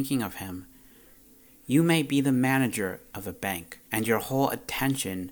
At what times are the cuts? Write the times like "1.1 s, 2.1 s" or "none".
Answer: 3.8 s

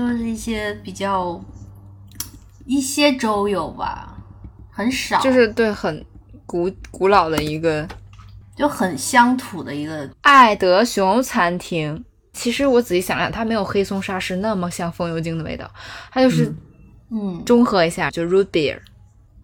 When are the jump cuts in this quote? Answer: 10.1 s, 12.3 s, 18.1 s

